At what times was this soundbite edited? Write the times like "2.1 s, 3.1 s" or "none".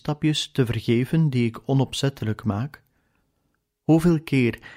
none